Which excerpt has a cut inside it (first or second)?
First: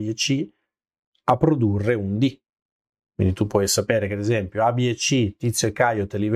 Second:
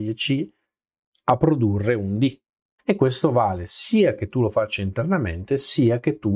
second